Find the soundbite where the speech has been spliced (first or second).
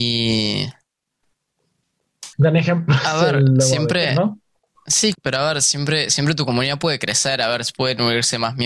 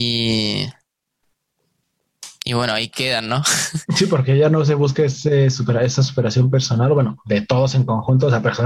first